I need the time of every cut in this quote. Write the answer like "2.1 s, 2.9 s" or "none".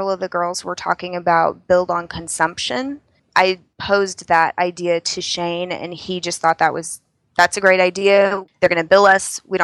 none